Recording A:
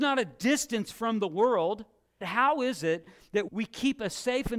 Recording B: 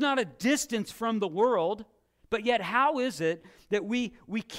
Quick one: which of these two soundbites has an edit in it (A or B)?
A